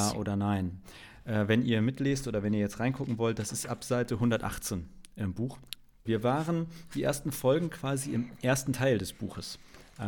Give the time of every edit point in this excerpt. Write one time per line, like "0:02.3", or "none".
0:06.1